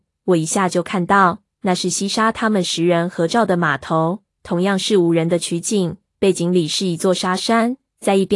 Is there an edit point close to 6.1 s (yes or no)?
no